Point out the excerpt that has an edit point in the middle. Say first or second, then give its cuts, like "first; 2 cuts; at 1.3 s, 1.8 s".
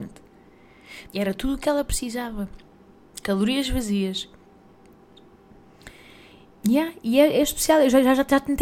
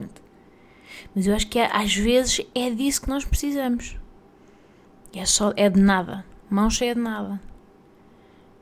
first; 2 cuts; at 1.0 s, 6.5 s